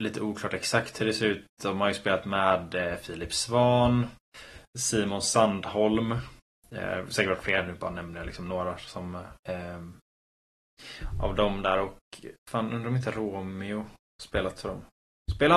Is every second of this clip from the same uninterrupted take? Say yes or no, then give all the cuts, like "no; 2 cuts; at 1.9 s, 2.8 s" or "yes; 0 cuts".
no; 1 cut; at 9.4 s